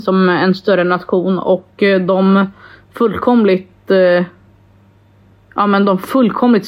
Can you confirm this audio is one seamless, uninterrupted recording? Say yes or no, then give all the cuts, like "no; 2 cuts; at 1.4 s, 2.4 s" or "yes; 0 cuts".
yes; 0 cuts